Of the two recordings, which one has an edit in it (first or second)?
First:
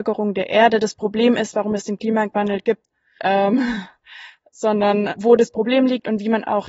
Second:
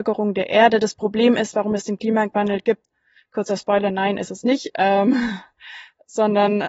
first